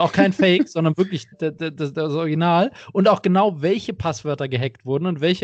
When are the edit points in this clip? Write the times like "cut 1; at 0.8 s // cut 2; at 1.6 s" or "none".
cut 1; at 1.3 s